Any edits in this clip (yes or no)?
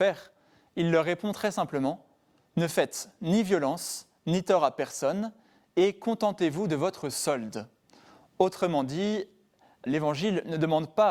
yes